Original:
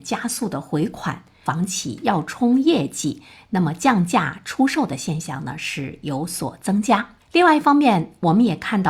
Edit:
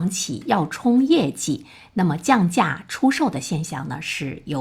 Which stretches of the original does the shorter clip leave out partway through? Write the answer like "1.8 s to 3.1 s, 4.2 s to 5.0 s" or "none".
none